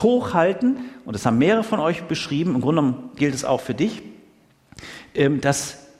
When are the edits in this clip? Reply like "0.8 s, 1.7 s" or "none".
none